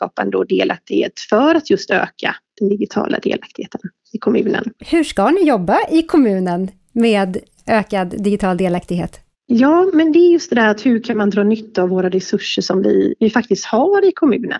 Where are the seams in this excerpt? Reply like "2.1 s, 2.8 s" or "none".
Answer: none

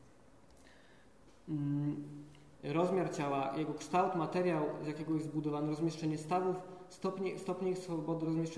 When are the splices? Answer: 2.5 s

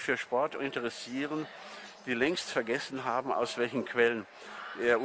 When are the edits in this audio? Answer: none

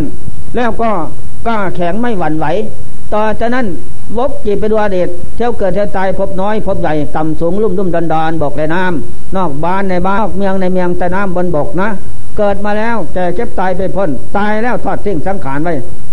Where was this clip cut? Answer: 10.2 s

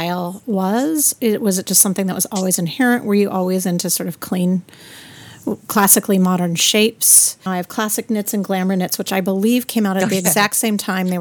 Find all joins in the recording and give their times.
7.5 s

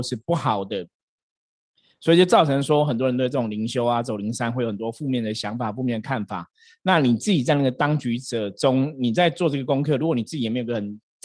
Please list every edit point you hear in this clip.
none

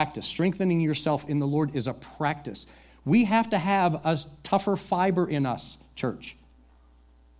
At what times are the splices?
none

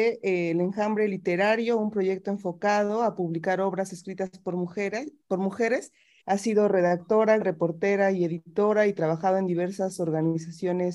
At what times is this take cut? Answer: 6.2 s, 7.4 s

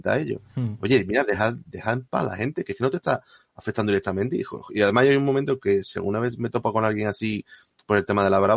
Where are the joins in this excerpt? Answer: none

